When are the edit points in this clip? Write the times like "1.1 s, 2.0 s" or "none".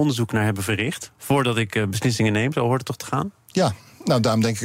none